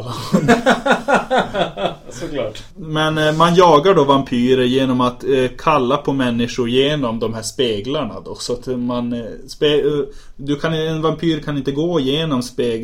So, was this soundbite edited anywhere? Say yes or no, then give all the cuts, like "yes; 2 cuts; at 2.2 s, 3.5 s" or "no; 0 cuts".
no; 0 cuts